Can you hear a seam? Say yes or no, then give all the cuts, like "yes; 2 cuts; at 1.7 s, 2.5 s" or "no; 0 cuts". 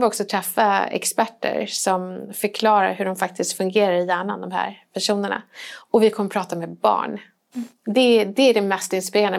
no; 0 cuts